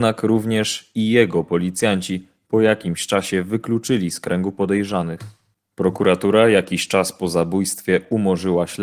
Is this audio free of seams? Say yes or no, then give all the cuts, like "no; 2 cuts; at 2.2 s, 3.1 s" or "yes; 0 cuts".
yes; 0 cuts